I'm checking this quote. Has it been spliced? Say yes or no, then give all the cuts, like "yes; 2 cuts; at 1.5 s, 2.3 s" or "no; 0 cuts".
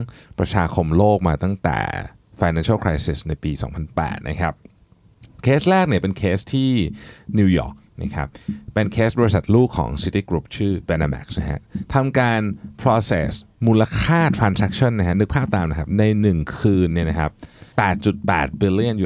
yes; 1 cut; at 17.7 s